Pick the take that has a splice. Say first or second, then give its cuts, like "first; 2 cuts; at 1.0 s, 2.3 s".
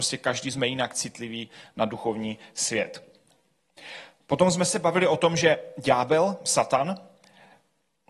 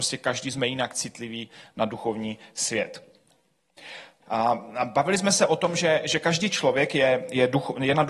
second; 1 cut; at 4.2 s